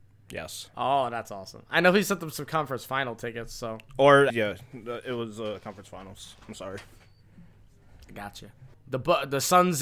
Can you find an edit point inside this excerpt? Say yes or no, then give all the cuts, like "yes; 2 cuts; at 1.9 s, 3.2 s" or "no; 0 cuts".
yes; 2 cuts; at 4.3 s, 8.7 s